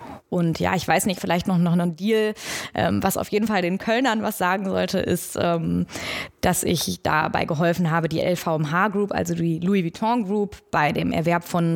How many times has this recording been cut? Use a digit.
1